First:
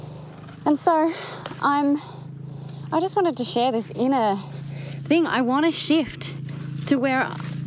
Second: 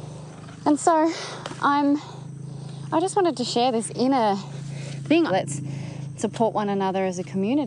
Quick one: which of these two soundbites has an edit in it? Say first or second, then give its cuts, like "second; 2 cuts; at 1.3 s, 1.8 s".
second; 1 cut; at 5.3 s